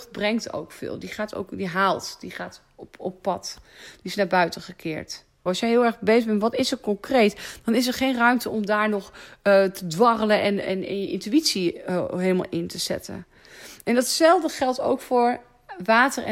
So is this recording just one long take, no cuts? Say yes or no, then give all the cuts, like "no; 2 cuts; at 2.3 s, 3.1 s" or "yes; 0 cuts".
no; 1 cut; at 5.5 s